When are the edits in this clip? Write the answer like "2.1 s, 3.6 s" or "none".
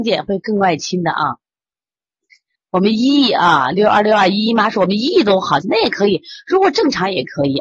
2.6 s, 5.6 s